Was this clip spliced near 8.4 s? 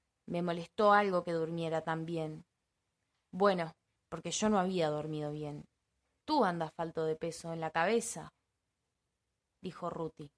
no; 2 cuts; at 4.0 s, 6.2 s

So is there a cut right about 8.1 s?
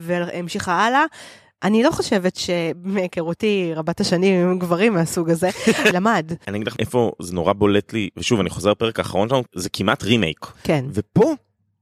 no; 3 cuts; at 5.9 s, 9.5 s, 10.6 s

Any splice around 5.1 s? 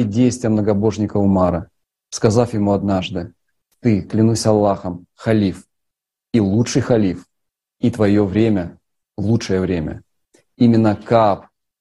no; 0 cuts

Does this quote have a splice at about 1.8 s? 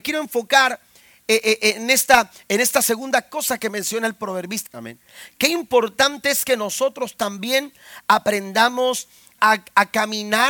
no; 2 cuts; at 4.7 s, 9.4 s

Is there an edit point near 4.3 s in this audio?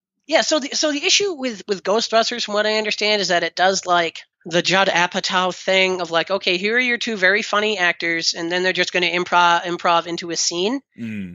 yes; 1 cut; at 4.3 s

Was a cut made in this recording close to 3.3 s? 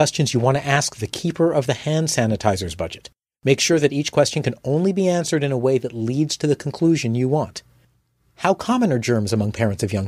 no; 0 cuts

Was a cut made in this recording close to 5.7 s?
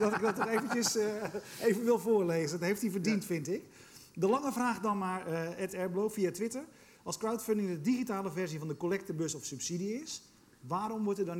no; 0 cuts

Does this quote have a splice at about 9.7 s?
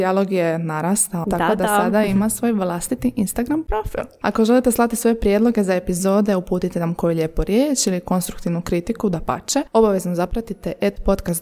no; 1 cut; at 1.2 s

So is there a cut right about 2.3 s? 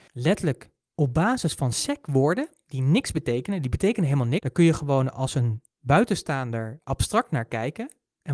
no; 2 cuts; at 4.4 s, 5.7 s

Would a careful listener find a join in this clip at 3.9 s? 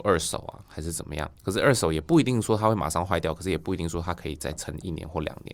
no; 1 cut; at 1.4 s

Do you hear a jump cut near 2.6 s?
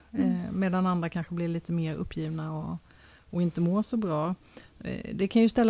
no; 0 cuts

